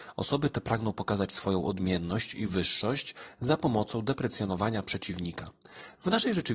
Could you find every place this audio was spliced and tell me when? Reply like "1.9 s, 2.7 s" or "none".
none